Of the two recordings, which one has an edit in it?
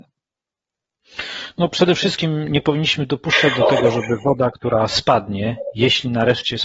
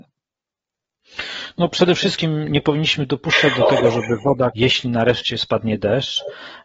second; 1 cut; at 4.5 s

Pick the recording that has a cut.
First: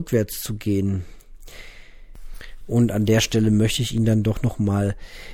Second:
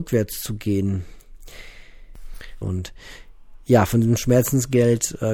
second; 1 cut; at 2.6 s

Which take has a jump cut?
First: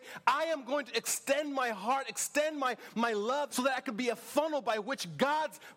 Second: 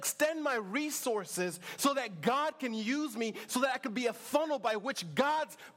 first; 1 cut; at 3.5 s

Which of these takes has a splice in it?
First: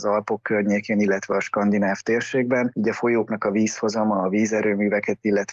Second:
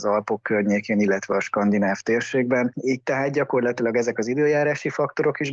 second; 1 cut; at 2.7 s

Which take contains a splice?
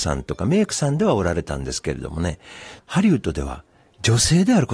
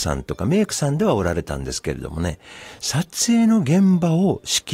first; 1 cut; at 2.8 s

